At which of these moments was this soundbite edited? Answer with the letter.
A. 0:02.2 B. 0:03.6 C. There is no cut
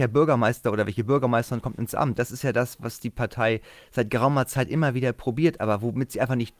A